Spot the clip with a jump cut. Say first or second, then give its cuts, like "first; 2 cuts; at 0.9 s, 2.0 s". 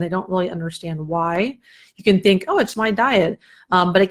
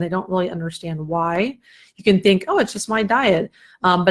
first; 1 cut; at 2.7 s